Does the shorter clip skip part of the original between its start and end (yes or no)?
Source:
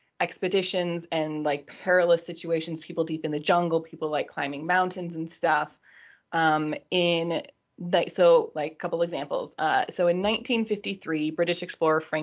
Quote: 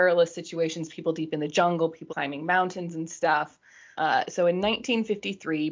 yes